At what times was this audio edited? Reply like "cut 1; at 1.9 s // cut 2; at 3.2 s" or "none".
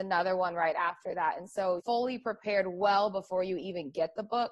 cut 1; at 1.8 s